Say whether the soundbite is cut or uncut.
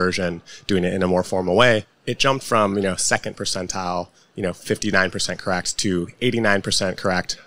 uncut